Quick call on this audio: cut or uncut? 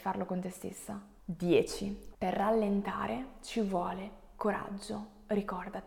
cut